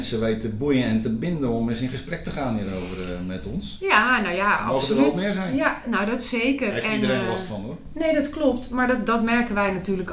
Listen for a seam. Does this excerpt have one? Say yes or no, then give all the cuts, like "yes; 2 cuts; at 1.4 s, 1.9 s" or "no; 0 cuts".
no; 0 cuts